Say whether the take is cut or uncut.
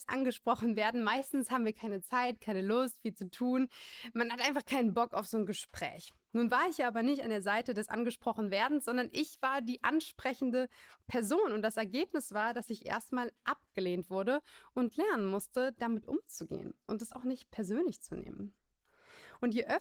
uncut